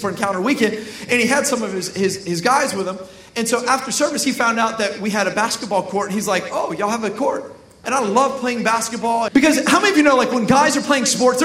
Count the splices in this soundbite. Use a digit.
2